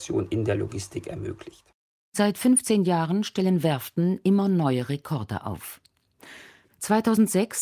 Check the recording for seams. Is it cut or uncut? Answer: uncut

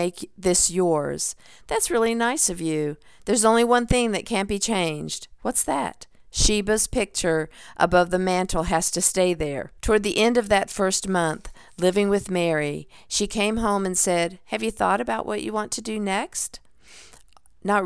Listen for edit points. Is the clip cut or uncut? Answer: cut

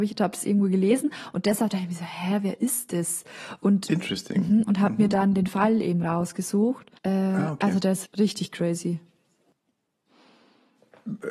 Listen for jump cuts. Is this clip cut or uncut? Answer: cut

